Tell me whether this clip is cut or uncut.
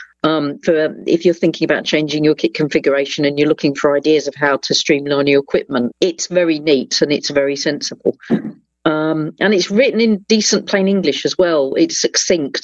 cut